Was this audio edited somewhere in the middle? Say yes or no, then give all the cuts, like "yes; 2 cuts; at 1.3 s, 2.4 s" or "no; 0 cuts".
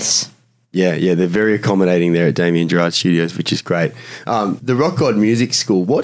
yes; 1 cut; at 4.6 s